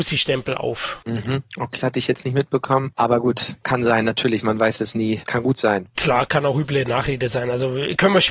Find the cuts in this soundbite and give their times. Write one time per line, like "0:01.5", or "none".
0:01.8
0:05.2